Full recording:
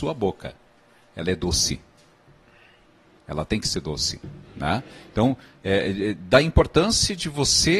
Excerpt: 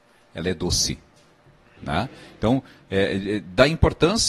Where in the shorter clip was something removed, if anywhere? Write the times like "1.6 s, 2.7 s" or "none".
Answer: 1.8 s